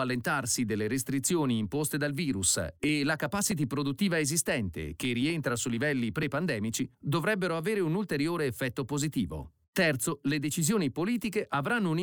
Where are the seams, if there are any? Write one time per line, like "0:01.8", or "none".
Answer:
none